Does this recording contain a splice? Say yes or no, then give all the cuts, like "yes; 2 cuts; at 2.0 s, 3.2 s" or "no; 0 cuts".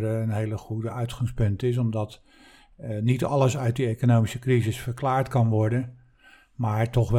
no; 0 cuts